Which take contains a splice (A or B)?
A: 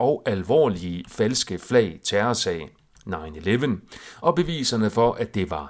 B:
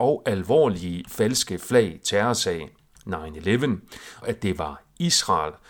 B